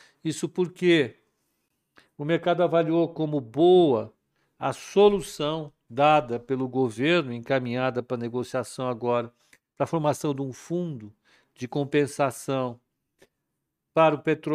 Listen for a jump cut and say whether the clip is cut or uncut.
uncut